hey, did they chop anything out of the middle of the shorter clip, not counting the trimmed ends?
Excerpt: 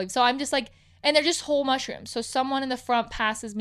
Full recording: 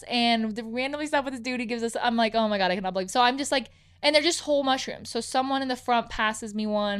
no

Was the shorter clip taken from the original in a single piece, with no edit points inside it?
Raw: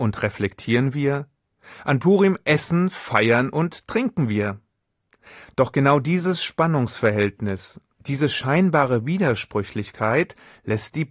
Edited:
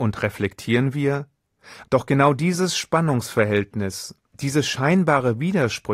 no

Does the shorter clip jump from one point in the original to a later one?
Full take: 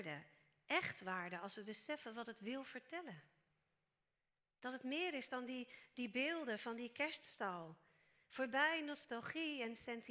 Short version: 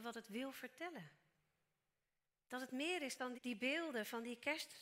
yes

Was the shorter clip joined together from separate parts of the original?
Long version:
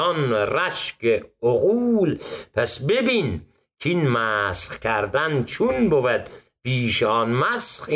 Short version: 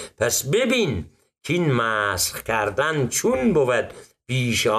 no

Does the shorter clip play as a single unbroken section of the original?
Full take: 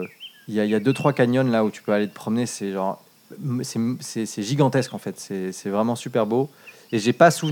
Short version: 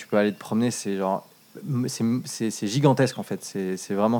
yes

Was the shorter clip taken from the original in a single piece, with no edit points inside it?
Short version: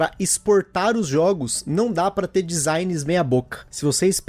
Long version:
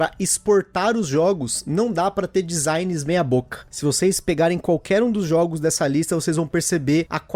yes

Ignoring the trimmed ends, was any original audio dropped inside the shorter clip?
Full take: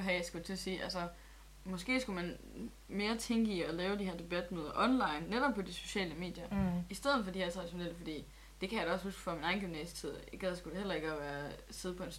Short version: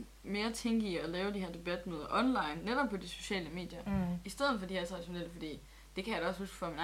no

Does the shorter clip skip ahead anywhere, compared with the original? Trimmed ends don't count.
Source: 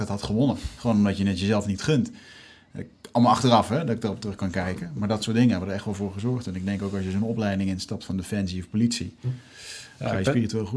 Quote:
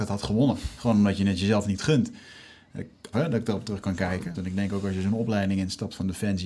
yes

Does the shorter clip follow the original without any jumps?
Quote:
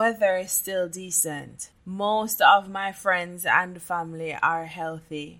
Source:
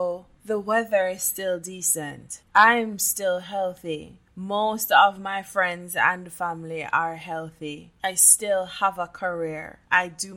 no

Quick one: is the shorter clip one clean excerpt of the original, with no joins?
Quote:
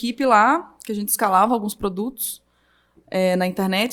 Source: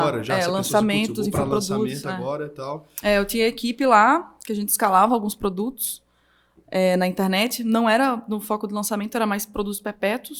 yes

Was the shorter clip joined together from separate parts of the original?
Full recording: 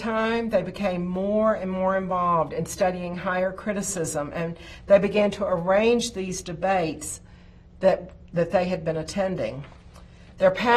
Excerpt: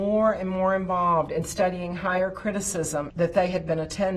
yes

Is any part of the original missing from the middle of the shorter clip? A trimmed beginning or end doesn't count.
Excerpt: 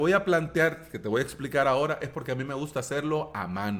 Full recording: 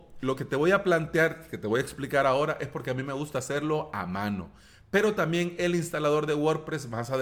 no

